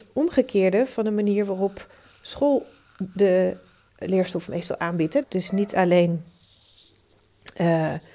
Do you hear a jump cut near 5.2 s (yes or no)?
yes